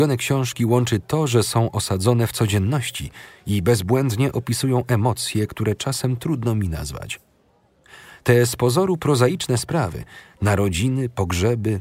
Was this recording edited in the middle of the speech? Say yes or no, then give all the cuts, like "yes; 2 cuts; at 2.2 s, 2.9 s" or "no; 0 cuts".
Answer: no; 0 cuts